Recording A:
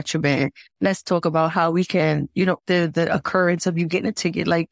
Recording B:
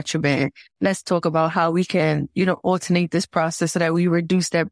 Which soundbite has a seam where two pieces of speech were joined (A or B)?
A